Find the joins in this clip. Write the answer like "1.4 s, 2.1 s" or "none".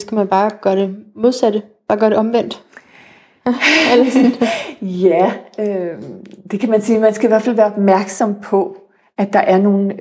none